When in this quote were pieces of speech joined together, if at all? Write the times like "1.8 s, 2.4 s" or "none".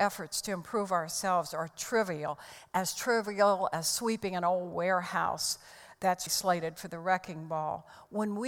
6.3 s